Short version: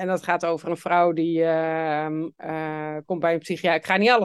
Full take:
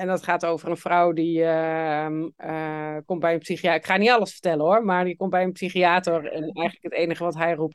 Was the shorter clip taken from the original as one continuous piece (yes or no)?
yes